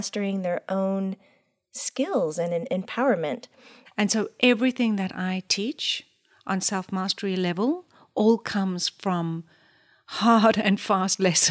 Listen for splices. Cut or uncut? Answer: cut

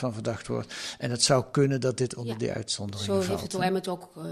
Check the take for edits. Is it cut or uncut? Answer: uncut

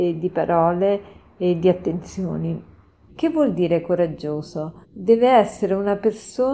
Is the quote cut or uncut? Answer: cut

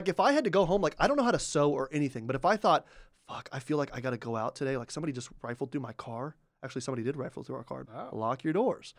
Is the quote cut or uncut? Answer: cut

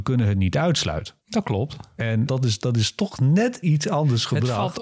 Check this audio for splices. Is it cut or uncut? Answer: cut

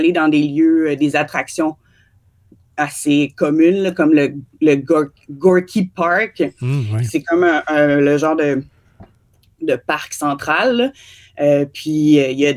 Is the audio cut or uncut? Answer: uncut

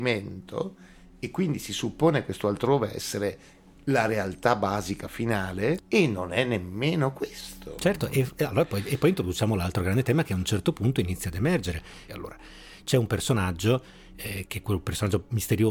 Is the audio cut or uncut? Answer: cut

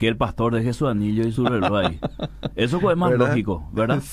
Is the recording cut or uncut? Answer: cut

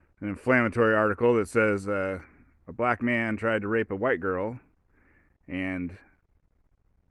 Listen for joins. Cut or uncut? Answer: uncut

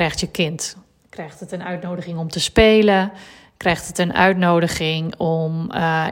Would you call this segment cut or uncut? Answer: uncut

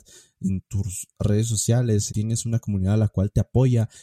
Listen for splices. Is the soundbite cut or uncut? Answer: cut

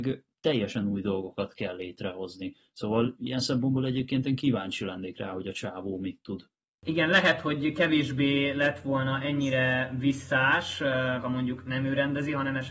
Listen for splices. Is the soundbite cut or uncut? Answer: cut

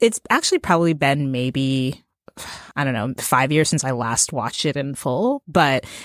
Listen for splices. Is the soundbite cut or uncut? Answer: uncut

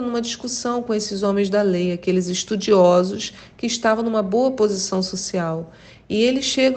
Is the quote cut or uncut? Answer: uncut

